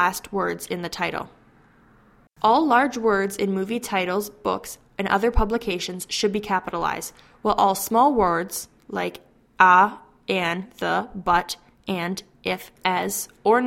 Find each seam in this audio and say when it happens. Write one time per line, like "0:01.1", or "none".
0:02.3